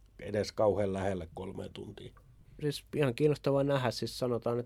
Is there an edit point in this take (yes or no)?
yes